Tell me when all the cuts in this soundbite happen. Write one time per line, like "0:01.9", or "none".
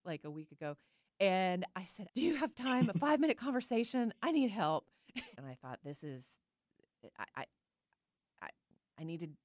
0:02.1
0:05.4